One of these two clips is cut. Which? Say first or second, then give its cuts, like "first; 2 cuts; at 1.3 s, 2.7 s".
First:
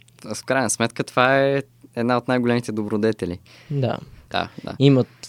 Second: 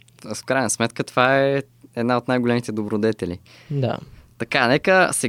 first; 1 cut; at 4.3 s